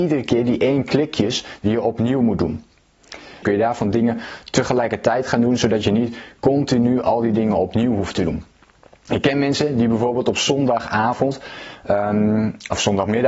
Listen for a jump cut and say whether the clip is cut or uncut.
cut